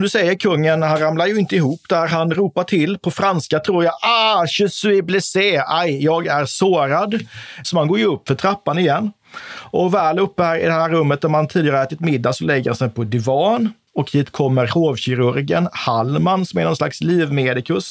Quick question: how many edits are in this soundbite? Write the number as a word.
one